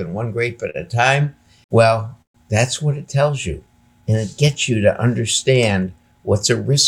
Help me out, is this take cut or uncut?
uncut